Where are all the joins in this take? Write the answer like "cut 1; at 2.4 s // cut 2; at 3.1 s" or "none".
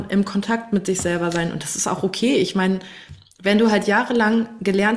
none

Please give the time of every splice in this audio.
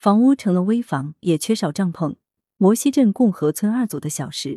cut 1; at 2.4 s

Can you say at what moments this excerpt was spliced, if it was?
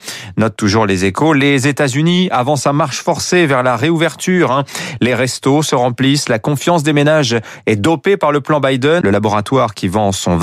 cut 1; at 5.0 s // cut 2; at 9.0 s

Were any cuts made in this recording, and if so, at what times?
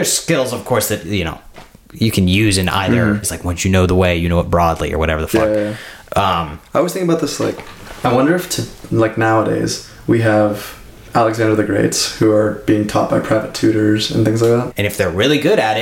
cut 1; at 3.2 s // cut 2; at 14.7 s

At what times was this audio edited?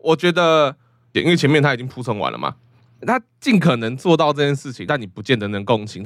cut 1; at 1.1 s // cut 2; at 3.0 s // cut 3; at 4.9 s

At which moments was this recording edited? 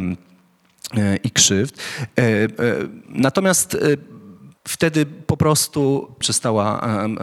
cut 1; at 4.6 s // cut 2; at 6.2 s

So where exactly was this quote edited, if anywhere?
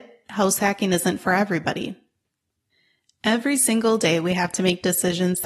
none

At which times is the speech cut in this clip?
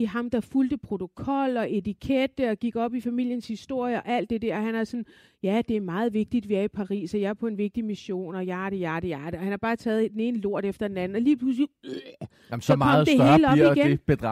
none

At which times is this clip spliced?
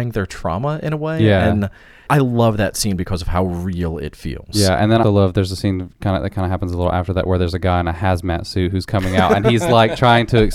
cut 1; at 2.1 s // cut 2; at 5.0 s

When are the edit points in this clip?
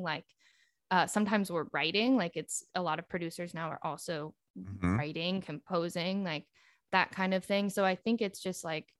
none

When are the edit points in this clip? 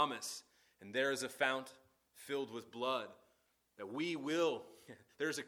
none

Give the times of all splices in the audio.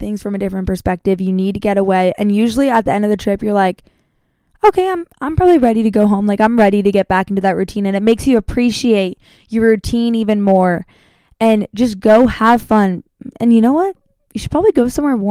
none

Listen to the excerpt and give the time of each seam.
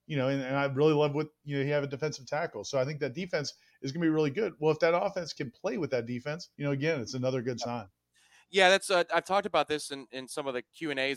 cut 1; at 6.5 s

